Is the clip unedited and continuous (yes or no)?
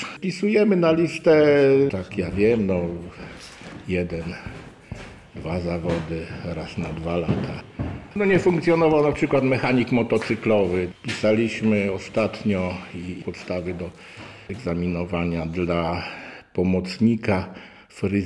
yes